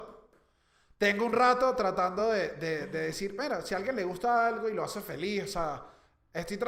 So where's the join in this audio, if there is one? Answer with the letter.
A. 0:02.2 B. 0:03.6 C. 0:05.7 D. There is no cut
D